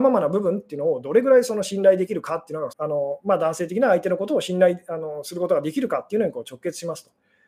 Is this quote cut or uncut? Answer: cut